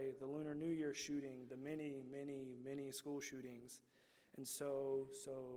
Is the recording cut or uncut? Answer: uncut